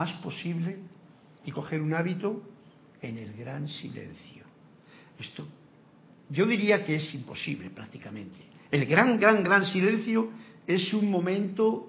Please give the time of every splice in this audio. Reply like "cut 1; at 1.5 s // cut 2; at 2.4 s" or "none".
none